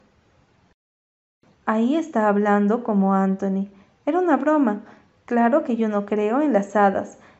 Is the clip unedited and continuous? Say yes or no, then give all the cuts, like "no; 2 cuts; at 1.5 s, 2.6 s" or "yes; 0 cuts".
no; 1 cut; at 1.5 s